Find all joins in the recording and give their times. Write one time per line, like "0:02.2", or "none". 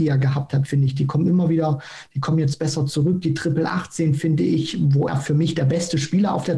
0:05.1